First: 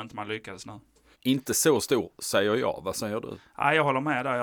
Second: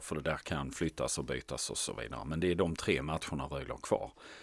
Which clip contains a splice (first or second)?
first